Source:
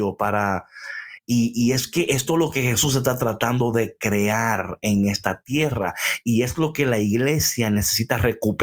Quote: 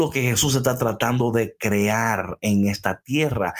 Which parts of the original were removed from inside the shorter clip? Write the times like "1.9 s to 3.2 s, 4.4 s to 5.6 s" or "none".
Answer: none